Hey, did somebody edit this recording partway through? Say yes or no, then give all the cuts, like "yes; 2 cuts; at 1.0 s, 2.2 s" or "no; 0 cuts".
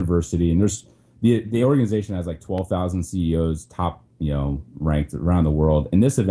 no; 0 cuts